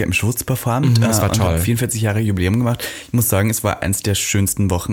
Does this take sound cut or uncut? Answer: uncut